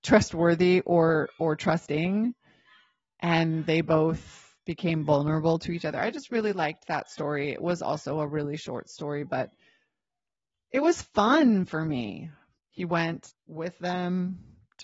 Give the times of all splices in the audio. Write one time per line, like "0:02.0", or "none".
0:13.3